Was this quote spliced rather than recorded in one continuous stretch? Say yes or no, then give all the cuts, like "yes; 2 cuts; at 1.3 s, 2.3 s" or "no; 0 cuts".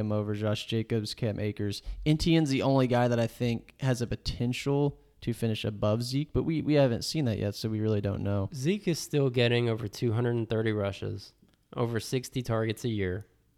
no; 0 cuts